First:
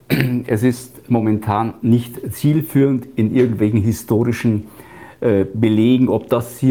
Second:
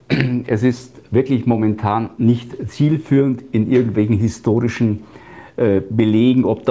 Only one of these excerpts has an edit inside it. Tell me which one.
first; 1 cut; at 1.1 s

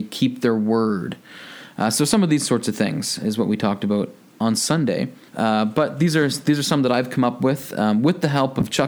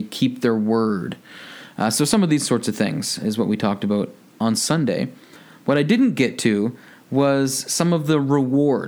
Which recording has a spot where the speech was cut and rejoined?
first; 1 cut; at 5.3 s

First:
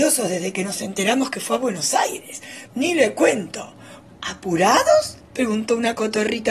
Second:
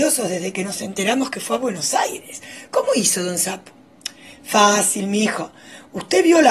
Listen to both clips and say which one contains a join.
first; 2 cuts; at 2.7 s, 4.1 s

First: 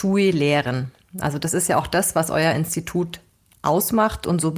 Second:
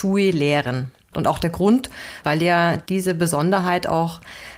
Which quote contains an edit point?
second; 2 cuts; at 1.1 s, 2.2 s

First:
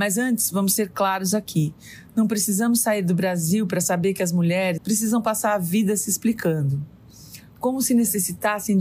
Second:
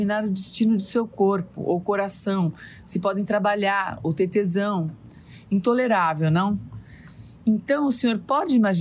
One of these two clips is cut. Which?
first; 1 cut; at 4.8 s

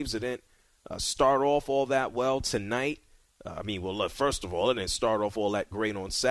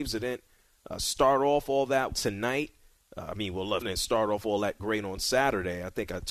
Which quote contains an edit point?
second; 2 cuts; at 2.1 s, 3.8 s

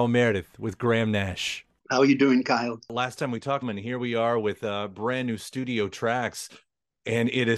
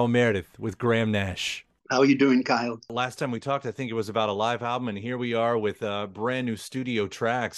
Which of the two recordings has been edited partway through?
first; 1 cut; at 3.6 s

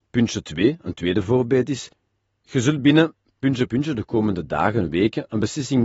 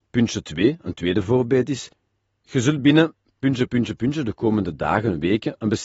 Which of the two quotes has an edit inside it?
first; 1 cut; at 3.7 s

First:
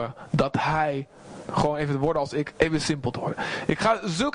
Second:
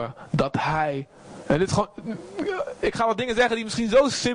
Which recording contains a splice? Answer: first; 1 cut; at 1.4 s

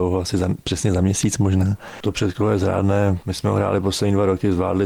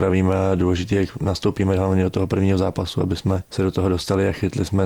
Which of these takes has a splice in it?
first; 1 cut; at 2.0 s

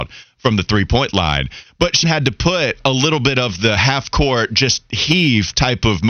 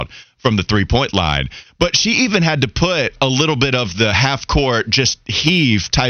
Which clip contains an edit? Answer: first; 1 cut; at 2.0 s

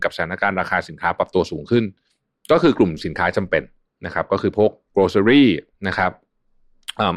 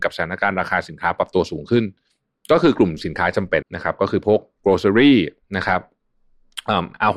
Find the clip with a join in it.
second; 1 cut; at 3.6 s

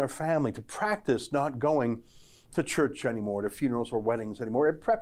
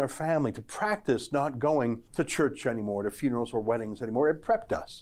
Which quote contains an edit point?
second; 1 cut; at 2.1 s

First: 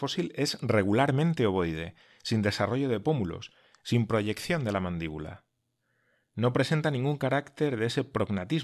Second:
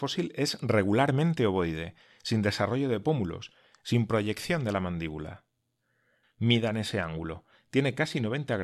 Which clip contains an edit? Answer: second; 1 cut; at 6.2 s

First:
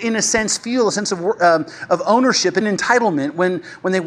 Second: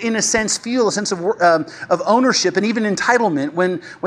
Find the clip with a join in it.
first; 1 cut; at 2.6 s

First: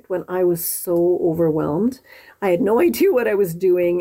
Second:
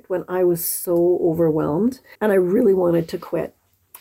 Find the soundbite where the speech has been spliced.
second; 1 cut; at 2.1 s

